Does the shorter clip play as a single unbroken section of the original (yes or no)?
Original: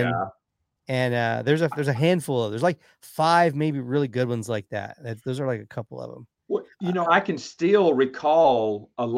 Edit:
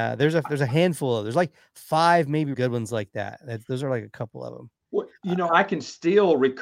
no